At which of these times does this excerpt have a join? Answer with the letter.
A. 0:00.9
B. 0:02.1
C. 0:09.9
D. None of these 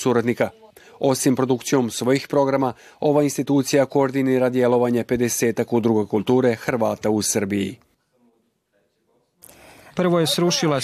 C